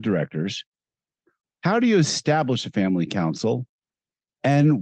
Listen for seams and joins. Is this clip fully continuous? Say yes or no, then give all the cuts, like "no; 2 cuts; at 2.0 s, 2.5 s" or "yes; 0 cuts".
no; 1 cut; at 1.4 s